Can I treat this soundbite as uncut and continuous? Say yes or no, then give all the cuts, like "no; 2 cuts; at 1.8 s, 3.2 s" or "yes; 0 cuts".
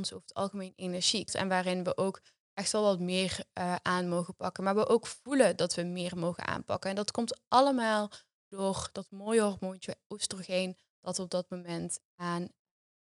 no; 1 cut; at 1.3 s